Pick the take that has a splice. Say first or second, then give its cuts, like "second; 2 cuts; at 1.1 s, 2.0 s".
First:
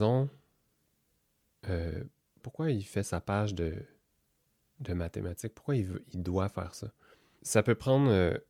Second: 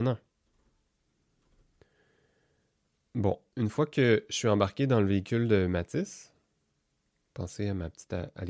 first; 2 cuts; at 2.4 s, 7.4 s